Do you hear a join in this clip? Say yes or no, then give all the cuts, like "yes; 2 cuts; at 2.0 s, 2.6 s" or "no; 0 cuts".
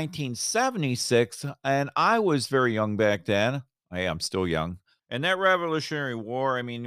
yes; 1 cut; at 5.0 s